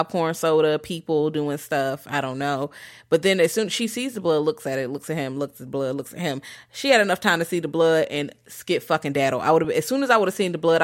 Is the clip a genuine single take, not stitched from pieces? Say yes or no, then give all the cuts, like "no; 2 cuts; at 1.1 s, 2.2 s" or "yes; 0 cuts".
yes; 0 cuts